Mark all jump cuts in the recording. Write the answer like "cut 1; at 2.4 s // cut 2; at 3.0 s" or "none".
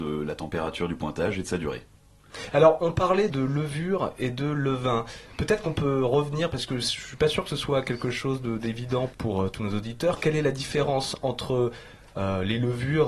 cut 1; at 3.3 s // cut 2; at 9.1 s